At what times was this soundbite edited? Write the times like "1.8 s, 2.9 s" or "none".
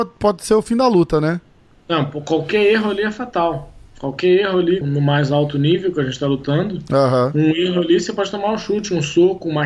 4.8 s